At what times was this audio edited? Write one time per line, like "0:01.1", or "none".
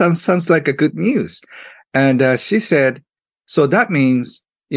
none